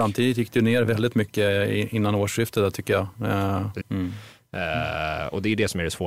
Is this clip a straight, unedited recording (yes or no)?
no